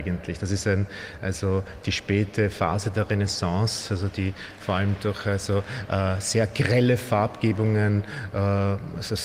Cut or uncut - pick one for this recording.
uncut